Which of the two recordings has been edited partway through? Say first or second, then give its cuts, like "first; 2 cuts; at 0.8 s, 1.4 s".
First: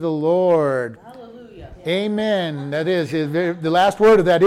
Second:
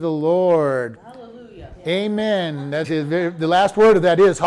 second; 1 cut; at 2.8 s